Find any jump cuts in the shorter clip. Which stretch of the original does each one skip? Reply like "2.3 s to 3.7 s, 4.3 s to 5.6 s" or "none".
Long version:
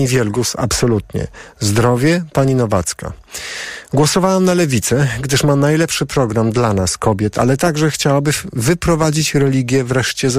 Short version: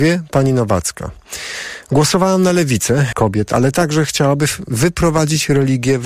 5.1 s to 7.0 s

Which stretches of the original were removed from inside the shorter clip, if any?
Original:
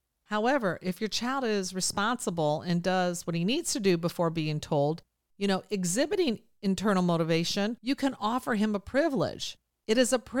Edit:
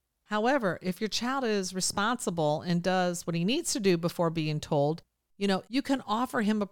5.7 s to 7.8 s

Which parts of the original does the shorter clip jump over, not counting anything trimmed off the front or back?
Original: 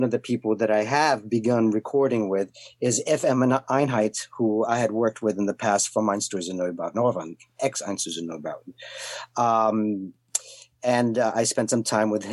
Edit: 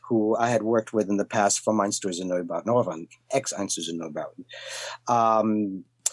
none

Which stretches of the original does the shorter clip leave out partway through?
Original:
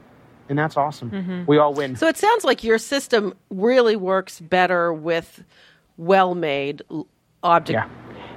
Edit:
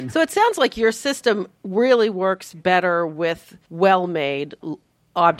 5.5 s to 5.9 s

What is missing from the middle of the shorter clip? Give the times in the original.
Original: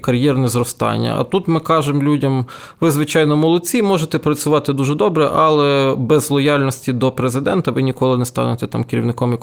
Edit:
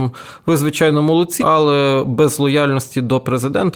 3.7 s to 5.3 s

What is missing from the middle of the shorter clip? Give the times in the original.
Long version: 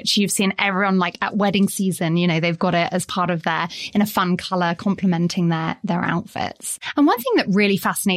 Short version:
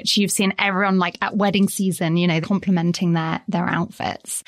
2.4 s to 4.8 s

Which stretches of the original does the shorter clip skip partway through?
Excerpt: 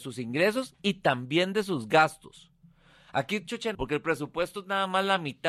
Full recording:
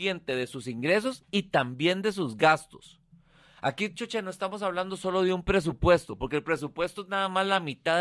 4.2 s to 6.2 s

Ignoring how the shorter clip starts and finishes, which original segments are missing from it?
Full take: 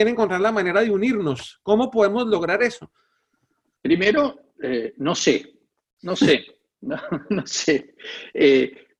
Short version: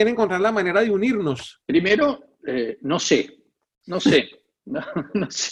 1.6 s to 3.8 s

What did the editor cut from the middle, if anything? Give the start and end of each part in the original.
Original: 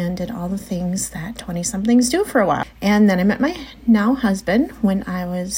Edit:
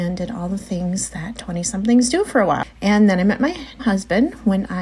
3.8 s to 4.2 s

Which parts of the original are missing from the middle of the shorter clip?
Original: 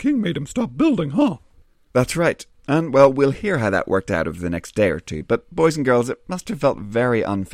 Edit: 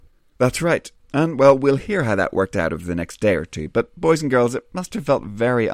none

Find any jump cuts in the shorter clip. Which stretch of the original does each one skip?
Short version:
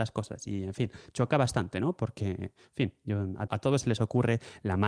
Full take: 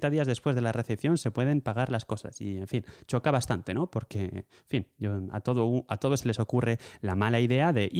5.4 s to 5.9 s

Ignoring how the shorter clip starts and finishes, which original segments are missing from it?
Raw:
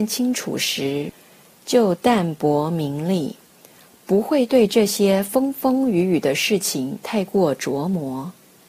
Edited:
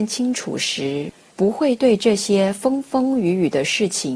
1.3 s to 4.0 s

